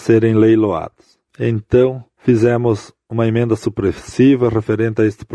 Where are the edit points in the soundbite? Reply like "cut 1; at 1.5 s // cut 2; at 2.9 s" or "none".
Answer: cut 1; at 1.2 s